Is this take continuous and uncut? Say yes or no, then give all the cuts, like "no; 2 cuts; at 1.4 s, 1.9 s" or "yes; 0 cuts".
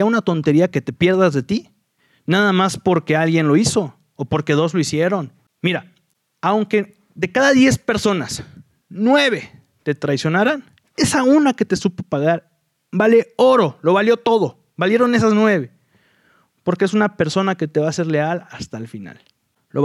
yes; 0 cuts